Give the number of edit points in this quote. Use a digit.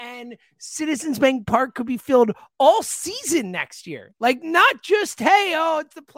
0